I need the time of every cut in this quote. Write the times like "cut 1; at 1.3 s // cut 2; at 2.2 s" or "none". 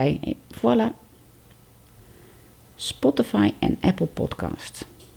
none